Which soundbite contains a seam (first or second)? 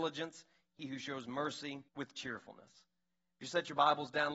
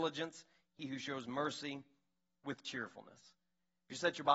first